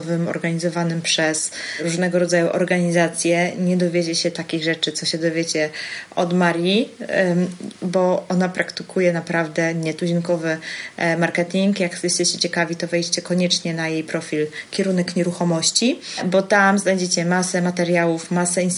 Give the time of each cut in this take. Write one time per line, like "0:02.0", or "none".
none

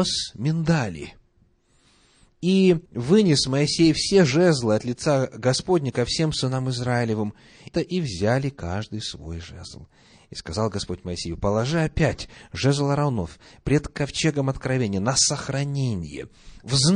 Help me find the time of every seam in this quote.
0:02.9
0:07.7

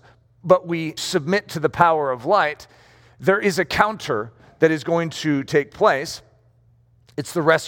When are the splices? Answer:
0:01.0

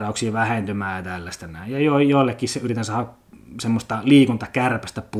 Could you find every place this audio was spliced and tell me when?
none

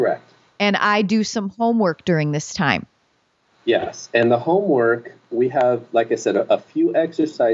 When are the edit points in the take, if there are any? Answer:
none

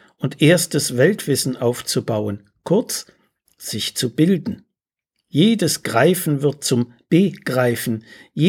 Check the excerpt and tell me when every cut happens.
none

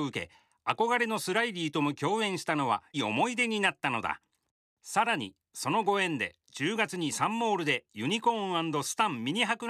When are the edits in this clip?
0:02.9

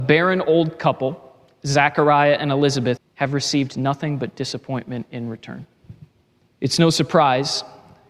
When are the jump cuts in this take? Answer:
0:03.0
0:06.5

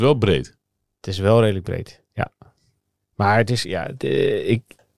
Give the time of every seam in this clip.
0:03.0

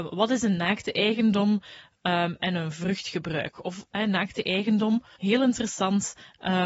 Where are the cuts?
0:05.2

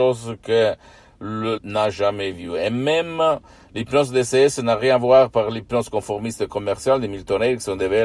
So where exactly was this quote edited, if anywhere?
0:01.6

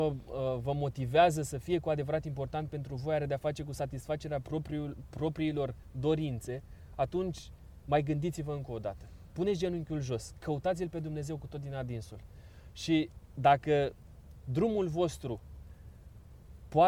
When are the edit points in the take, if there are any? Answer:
none

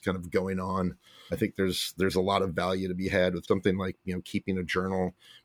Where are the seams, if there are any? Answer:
0:01.3
0:03.5

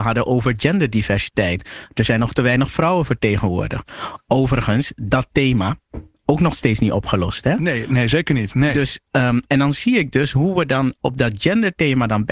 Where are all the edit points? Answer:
0:09.5

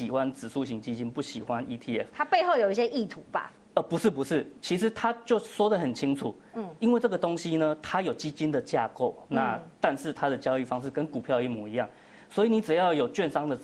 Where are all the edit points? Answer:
none

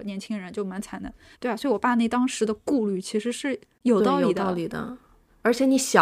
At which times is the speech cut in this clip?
none

